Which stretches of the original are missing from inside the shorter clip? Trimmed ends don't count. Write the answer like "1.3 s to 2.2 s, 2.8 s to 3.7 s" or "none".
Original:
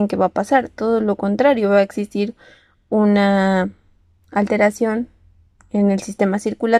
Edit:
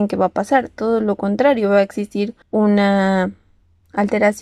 2.4 s to 2.8 s